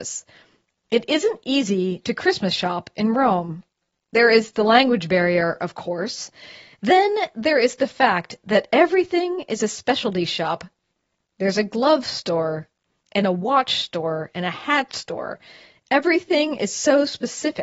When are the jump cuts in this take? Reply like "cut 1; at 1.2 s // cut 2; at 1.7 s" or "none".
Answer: none